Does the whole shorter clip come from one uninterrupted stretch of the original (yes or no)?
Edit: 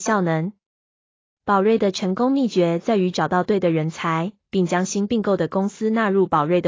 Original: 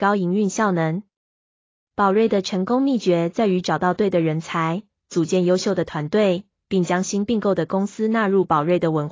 no